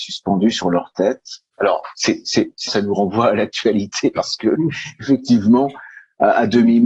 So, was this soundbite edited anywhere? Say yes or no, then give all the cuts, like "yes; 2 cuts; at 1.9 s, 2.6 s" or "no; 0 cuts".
yes; 2 cuts; at 1.5 s, 2.7 s